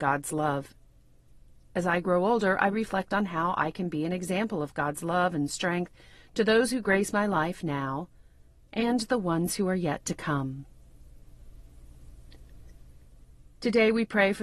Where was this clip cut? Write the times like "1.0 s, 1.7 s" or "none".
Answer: none